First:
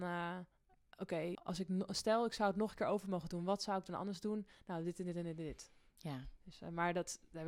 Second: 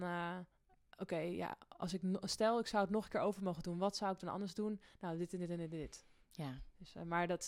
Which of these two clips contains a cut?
first; 1 cut; at 1.3 s

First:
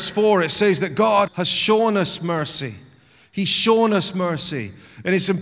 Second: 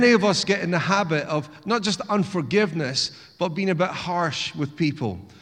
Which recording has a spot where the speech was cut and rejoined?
first; 1 cut; at 1.3 s

